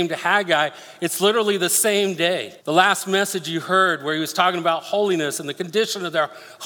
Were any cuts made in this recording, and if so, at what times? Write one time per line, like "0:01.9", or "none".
0:02.6